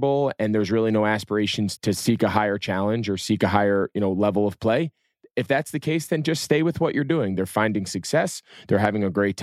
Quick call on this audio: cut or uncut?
cut